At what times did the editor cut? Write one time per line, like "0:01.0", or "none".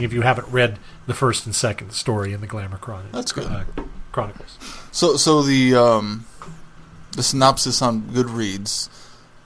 none